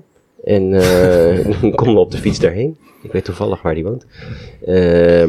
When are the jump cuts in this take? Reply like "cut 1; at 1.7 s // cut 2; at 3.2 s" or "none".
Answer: none